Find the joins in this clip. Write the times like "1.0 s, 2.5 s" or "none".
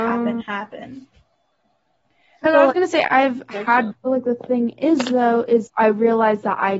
3.9 s, 5.7 s

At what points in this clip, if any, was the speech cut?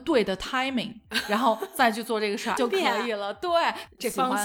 2.6 s

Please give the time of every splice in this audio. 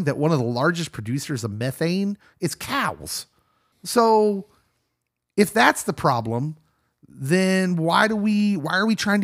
3.7 s

